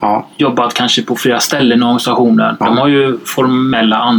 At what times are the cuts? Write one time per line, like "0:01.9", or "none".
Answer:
0:02.6